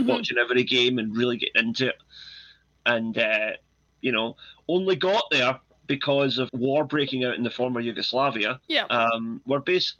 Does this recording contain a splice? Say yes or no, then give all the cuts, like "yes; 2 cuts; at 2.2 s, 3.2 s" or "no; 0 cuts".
yes; 3 cuts; at 3.9 s, 6.5 s, 8.6 s